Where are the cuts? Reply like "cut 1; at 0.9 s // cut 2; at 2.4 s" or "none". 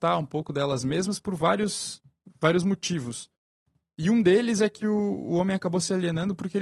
none